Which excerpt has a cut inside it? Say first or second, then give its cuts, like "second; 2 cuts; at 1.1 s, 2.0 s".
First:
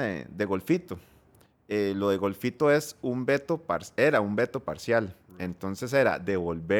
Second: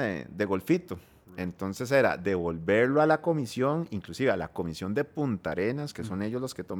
second; 1 cut; at 1.2 s